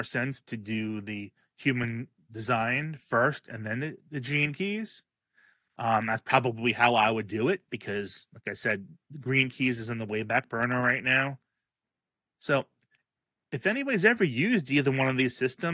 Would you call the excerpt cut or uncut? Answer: uncut